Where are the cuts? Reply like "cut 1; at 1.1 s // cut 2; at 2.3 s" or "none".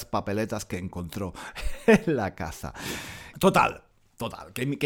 cut 1; at 3.3 s